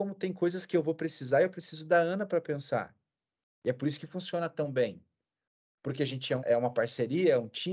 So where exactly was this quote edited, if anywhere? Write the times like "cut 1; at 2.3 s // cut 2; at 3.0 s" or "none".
cut 1; at 6.4 s

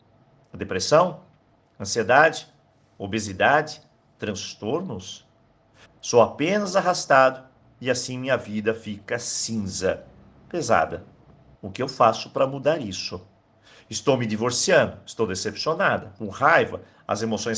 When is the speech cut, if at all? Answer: cut 1; at 5.9 s // cut 2; at 11.5 s

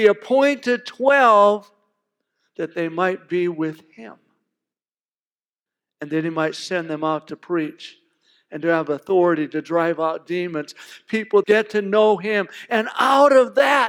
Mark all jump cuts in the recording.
cut 1; at 11.4 s

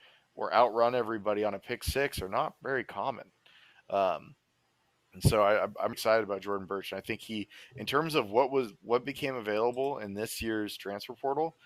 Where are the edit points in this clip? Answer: cut 1; at 5.9 s

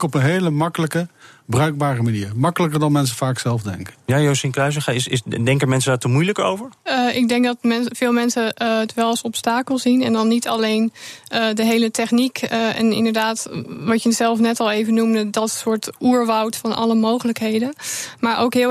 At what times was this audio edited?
cut 1; at 6.8 s

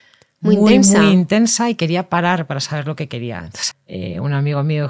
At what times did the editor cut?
cut 1; at 3.7 s

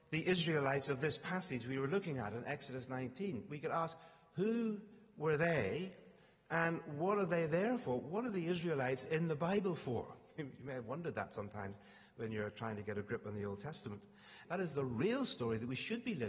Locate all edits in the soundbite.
cut 1; at 14.4 s

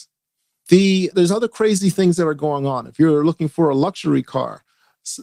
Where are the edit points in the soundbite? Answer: cut 1; at 1.1 s

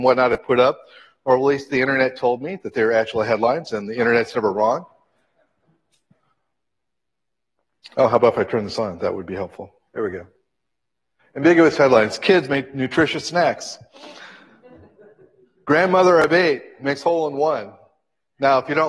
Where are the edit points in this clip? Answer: cut 1; at 9.9 s

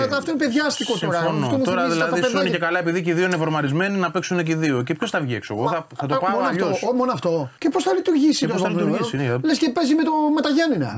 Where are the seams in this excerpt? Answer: cut 1; at 7.6 s

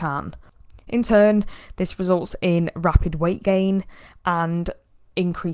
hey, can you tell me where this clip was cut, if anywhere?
none

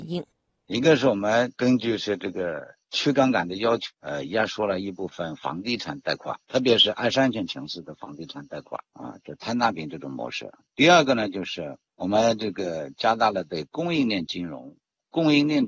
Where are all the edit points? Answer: none

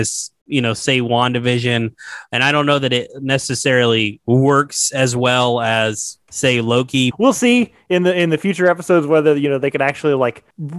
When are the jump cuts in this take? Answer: cut 1; at 7.1 s

